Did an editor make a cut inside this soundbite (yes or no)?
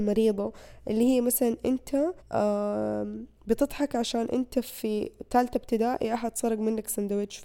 yes